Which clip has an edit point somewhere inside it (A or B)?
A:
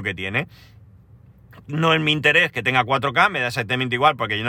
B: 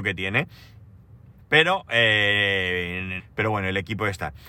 B